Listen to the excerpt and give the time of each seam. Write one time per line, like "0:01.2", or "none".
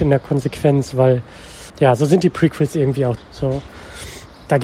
0:01.7
0:03.2